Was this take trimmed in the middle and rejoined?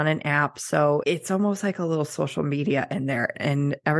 no; 0 cuts

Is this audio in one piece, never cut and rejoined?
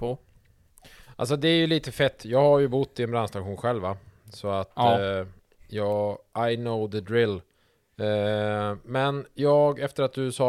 yes; 0 cuts

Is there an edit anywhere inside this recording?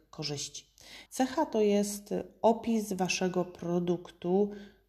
yes; 1 cut; at 1.1 s

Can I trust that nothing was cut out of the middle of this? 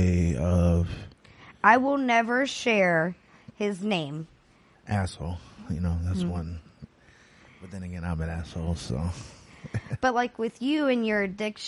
no; 1 cut; at 4.7 s

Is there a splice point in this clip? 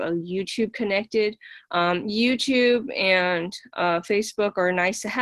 no; 0 cuts

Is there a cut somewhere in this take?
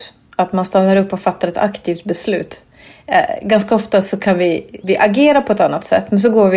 yes; 1 cut; at 4.8 s

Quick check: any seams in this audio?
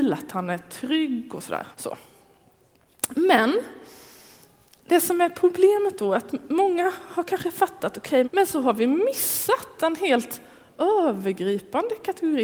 yes; 2 cuts; at 1.7 s, 8.2 s

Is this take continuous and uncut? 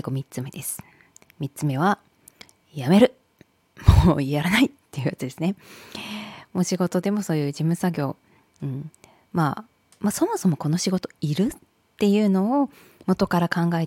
yes; 0 cuts

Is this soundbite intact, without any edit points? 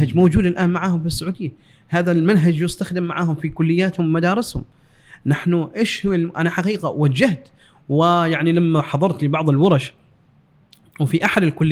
yes; 0 cuts

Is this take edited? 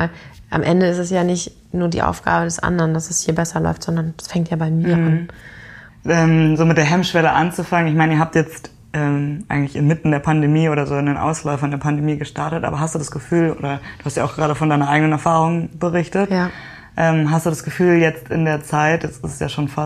yes; 1 cut; at 5.9 s

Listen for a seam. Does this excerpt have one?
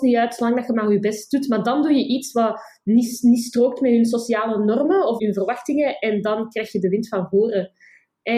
yes; 1 cut; at 5.2 s

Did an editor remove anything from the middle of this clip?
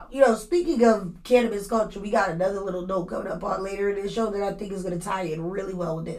no; 0 cuts

